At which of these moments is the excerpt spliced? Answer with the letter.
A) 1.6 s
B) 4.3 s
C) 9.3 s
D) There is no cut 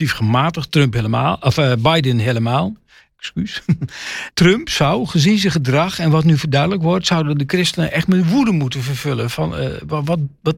B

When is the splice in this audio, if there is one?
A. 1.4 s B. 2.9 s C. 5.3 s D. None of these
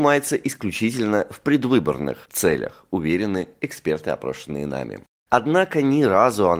C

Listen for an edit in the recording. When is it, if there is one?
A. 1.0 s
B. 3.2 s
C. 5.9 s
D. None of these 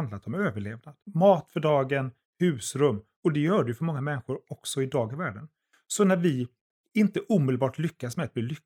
A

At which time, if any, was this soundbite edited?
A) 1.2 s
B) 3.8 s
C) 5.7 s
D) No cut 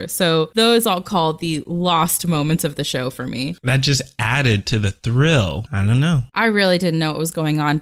C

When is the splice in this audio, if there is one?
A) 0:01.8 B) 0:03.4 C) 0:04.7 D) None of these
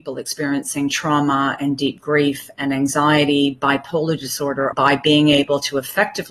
C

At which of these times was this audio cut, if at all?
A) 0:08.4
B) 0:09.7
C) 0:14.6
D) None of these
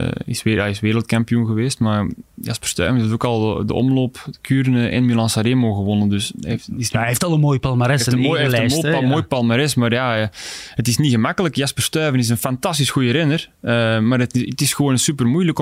D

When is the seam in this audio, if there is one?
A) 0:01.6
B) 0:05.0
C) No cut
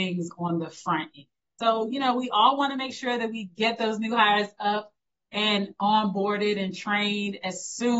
A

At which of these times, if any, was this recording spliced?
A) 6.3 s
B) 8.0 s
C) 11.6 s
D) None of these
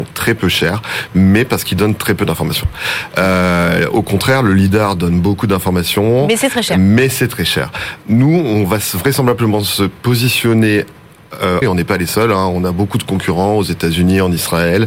C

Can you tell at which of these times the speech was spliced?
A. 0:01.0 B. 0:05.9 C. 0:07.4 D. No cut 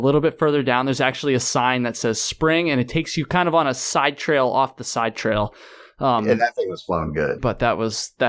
C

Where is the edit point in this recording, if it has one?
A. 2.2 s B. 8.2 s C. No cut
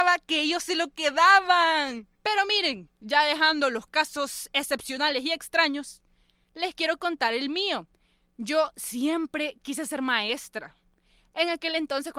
A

